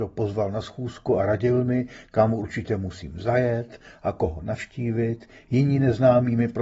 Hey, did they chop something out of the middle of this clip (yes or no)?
no